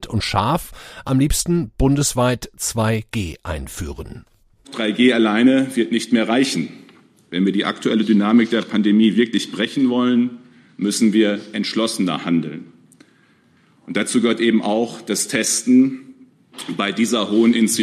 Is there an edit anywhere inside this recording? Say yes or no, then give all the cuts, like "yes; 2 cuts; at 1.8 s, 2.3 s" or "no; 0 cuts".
no; 0 cuts